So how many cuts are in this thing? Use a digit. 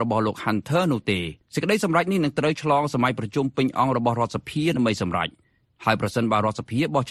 1